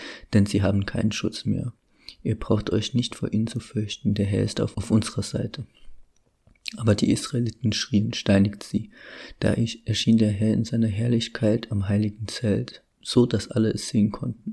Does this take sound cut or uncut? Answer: cut